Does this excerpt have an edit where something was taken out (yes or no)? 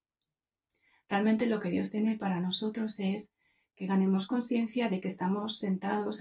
no